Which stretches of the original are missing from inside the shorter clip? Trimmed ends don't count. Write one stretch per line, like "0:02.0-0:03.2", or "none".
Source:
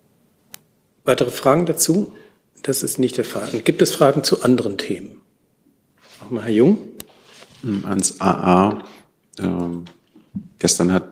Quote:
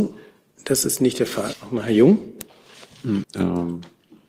0:03.5-0:06.1
0:07.8-0:09.3